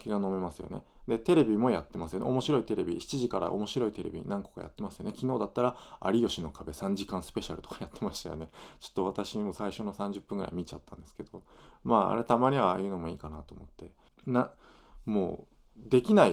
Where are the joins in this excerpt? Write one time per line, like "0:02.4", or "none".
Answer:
0:14.1

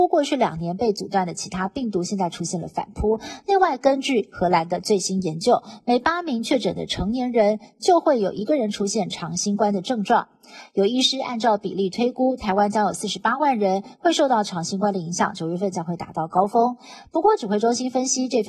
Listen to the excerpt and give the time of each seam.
none

